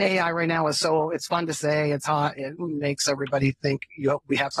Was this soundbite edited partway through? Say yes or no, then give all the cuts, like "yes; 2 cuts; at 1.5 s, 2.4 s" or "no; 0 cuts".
no; 0 cuts